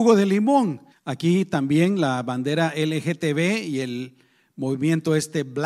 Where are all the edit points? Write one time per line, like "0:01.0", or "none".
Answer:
0:00.9